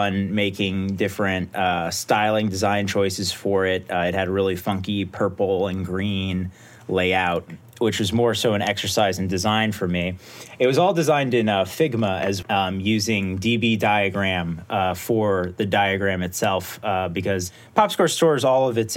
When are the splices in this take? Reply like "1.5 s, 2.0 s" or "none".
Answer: 12.4 s